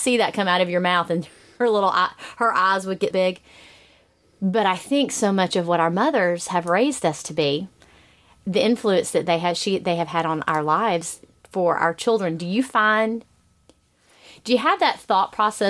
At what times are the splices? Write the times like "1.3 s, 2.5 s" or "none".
3.1 s